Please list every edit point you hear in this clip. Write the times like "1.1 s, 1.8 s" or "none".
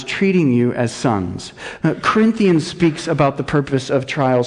1.8 s

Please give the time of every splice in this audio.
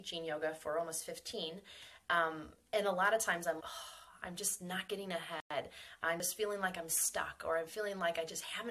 3.6 s

